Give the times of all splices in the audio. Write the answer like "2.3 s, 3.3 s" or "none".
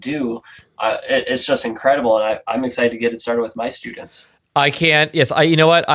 none